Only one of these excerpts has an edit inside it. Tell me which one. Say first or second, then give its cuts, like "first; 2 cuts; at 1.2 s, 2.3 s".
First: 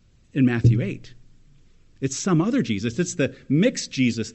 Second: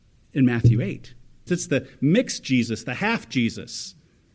second; 1 cut; at 1.5 s